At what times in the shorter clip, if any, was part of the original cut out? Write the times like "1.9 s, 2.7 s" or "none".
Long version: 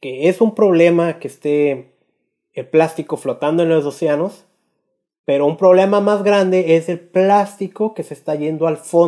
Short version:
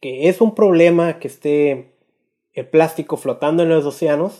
none